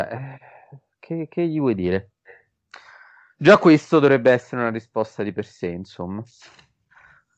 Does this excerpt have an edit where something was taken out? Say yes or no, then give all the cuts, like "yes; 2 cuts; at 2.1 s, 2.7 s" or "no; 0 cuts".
no; 0 cuts